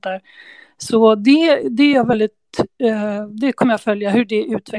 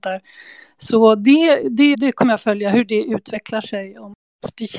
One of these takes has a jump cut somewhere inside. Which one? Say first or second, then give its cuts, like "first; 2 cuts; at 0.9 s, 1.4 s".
second; 1 cut; at 1.9 s